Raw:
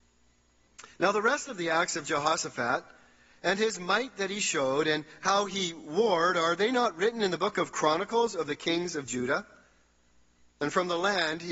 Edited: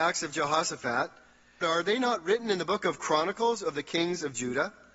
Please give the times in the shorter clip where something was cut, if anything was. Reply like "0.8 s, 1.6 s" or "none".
1.6 s